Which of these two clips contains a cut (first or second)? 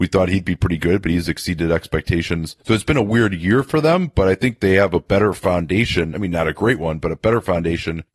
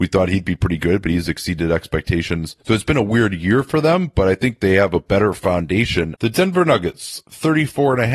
second